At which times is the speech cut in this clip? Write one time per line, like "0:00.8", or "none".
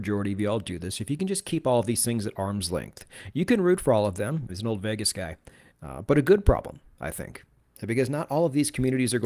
0:04.5
0:05.7